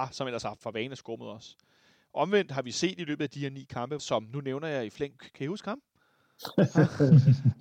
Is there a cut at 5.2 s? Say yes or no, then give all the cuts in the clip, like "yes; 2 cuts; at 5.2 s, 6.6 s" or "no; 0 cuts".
yes; 2 cuts; at 4.0 s, 5.2 s